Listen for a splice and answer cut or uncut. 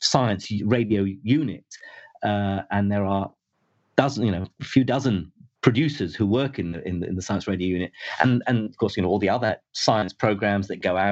uncut